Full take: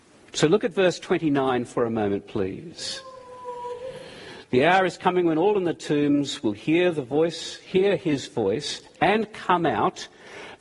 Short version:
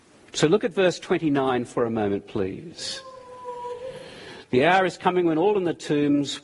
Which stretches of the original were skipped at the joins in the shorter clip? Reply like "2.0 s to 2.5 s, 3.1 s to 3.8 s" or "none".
none